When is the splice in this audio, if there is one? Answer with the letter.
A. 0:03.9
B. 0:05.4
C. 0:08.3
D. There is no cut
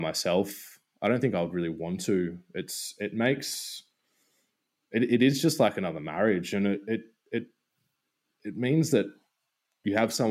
D